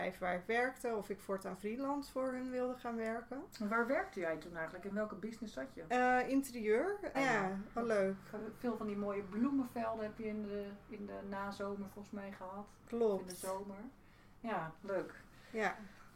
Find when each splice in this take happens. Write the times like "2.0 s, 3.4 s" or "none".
7.1 s